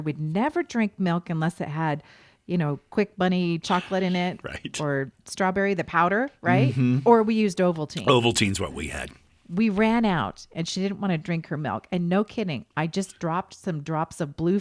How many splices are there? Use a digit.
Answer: 0